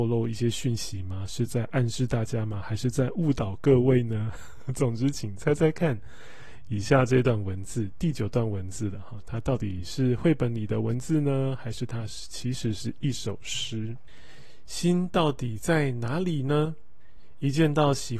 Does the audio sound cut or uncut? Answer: uncut